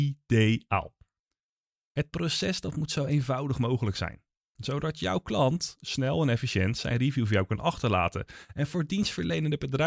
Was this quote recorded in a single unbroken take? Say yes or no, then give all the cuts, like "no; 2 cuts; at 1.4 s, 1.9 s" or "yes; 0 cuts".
yes; 0 cuts